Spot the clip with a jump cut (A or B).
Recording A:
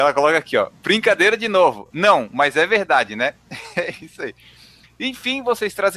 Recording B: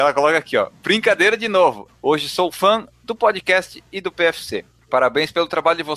B